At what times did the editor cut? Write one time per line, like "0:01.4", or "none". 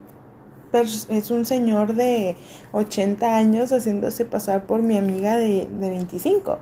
none